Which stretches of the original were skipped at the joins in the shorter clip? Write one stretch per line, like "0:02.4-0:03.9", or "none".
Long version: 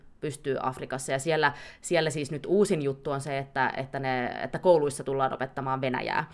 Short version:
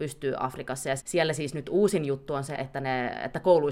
0:01.2-0:01.8
0:03.3-0:03.7